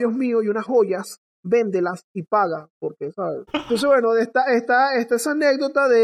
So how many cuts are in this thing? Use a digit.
1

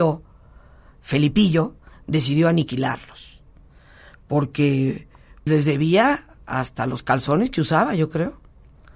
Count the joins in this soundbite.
1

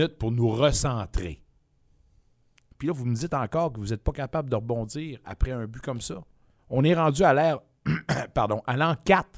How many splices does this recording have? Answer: 2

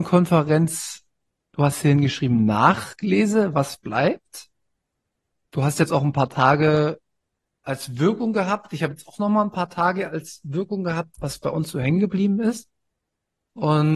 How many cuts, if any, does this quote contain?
0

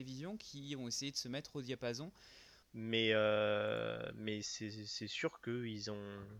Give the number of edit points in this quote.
1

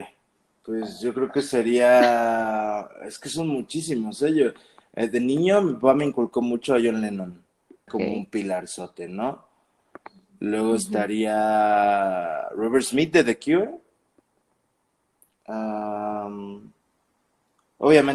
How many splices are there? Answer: 1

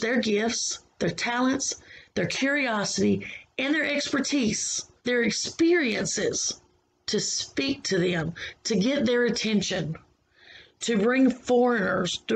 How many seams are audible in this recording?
1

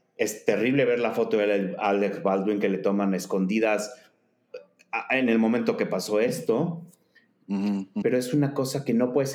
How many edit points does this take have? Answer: 1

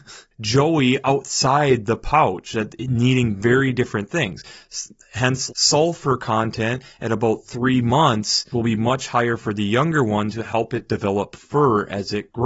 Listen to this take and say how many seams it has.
2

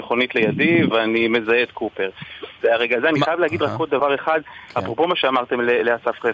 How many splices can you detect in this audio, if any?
2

